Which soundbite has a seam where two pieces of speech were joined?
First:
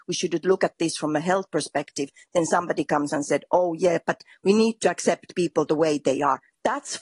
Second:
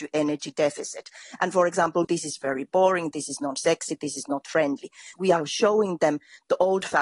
second; 2 cuts; at 2.0 s, 5.2 s

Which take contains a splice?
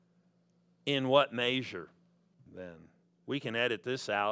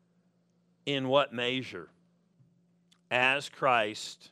first; 1 cut; at 2.5 s

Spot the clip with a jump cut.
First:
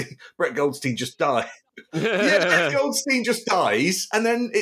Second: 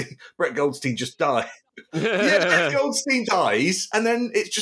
second; 1 cut; at 3.2 s

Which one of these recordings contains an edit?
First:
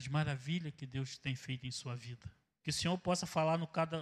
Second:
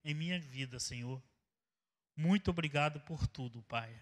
first; 1 cut; at 2.6 s

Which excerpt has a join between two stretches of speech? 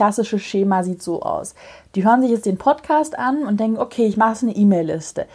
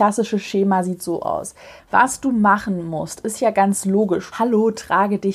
second; 2 cuts; at 1.8 s, 4.3 s

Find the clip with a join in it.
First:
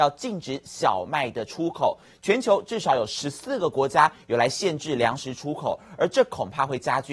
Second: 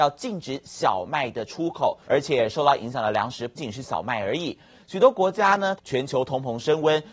second; 3 cuts; at 2.0 s, 3.6 s, 5.8 s

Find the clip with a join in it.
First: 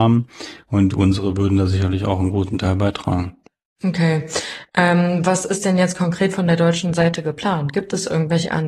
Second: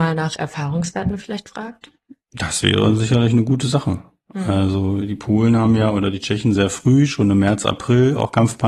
second; 1 cut; at 6.5 s

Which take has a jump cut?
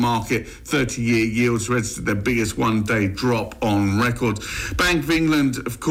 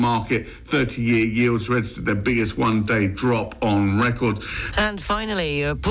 second; 1 cut; at 4.7 s

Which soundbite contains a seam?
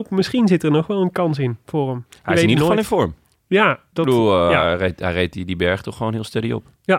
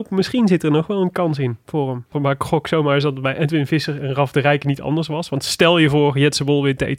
second; 1 cut; at 2.1 s

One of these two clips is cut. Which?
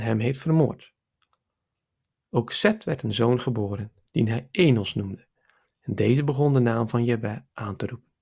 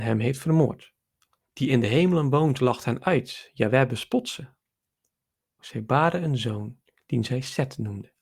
second; 2 cuts; at 1.4 s, 5.6 s

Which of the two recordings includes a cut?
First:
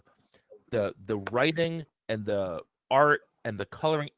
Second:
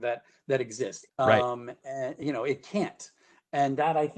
second; 1 cut; at 1.1 s

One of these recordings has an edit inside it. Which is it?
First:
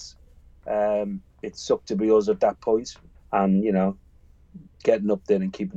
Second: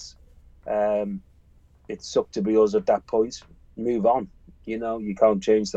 first; 2 cuts; at 1.3 s, 3.2 s

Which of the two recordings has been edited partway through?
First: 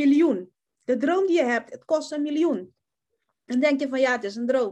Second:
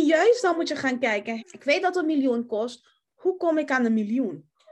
second; 1 cut; at 1.4 s

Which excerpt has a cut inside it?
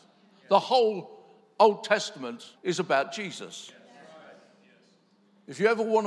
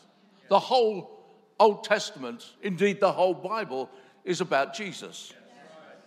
first; 1 cut; at 2.5 s

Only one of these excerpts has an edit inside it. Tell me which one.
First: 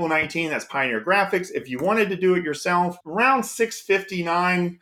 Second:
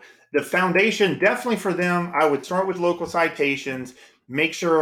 first; 1 cut; at 3.0 s

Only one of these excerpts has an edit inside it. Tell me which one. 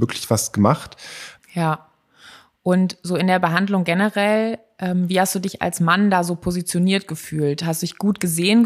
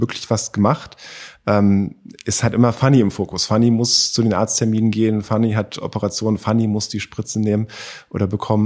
first; 1 cut; at 1.4 s

